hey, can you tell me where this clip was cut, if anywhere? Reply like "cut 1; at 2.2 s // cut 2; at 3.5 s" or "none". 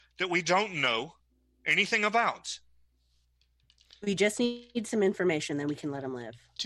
none